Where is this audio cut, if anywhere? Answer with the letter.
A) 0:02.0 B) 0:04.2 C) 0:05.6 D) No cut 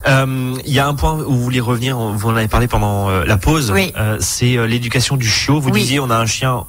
D